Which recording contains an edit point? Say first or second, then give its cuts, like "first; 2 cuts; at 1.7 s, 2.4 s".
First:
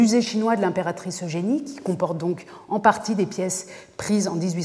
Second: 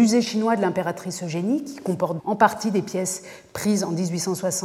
second; 1 cut; at 2.2 s